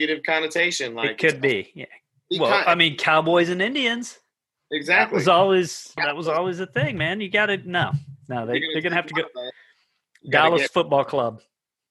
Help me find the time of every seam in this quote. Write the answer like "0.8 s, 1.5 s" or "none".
6.0 s